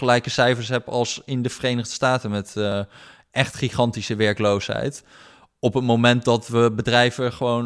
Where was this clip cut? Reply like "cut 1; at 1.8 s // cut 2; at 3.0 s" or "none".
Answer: none